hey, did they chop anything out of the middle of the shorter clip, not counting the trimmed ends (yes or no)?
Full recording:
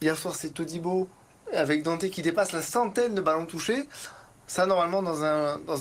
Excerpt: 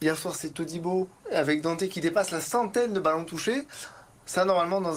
yes